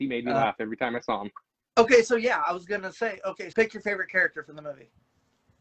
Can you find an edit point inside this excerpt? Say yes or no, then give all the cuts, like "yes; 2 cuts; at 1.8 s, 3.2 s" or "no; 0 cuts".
yes; 1 cut; at 3.5 s